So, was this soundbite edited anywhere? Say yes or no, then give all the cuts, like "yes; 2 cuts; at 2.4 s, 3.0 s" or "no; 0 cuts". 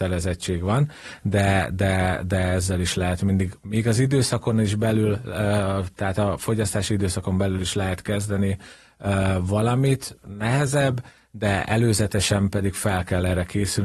no; 0 cuts